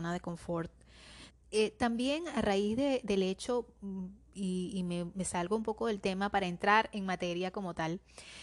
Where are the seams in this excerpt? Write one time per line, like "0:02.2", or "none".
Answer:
0:01.3